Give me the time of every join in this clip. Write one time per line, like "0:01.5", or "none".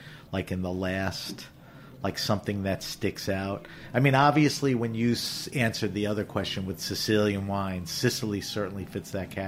none

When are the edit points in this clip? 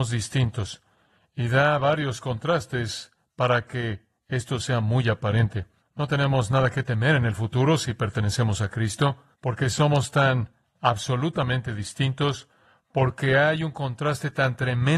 0:05.8
0:09.3

